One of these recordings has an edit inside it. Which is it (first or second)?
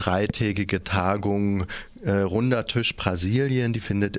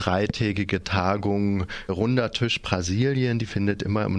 second